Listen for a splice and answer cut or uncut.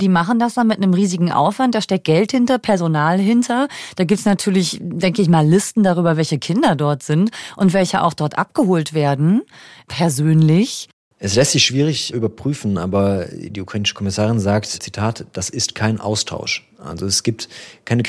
uncut